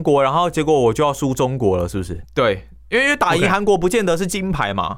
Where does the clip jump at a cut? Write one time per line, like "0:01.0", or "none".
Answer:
0:02.2